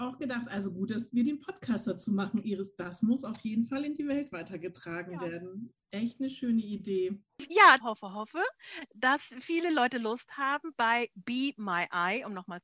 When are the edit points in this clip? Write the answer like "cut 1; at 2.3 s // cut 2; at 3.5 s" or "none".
cut 1; at 7.8 s